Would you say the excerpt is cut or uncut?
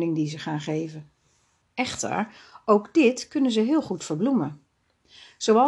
cut